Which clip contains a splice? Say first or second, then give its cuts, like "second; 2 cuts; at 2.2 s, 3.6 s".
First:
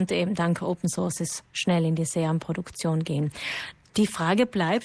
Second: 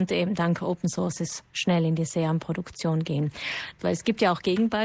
second; 1 cut; at 3.8 s